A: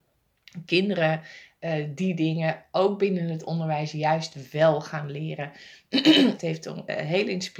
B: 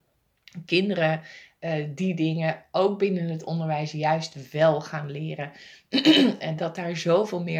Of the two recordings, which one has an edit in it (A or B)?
A